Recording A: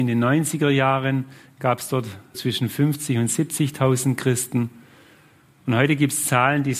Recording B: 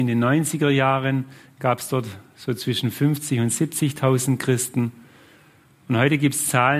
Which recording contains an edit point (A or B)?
A